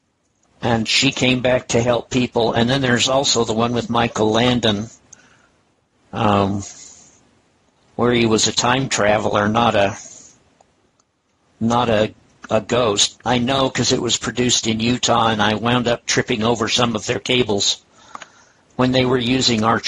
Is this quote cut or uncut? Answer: cut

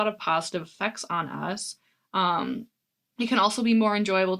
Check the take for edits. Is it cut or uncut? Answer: uncut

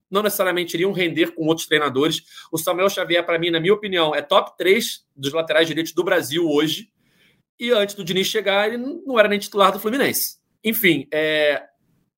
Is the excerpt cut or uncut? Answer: cut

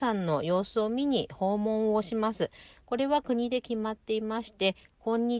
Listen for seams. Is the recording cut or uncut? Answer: uncut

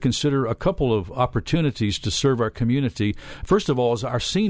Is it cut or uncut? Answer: uncut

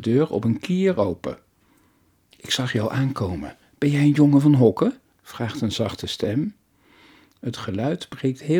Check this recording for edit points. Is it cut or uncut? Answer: uncut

